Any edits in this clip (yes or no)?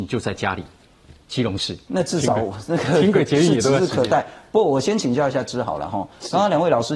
yes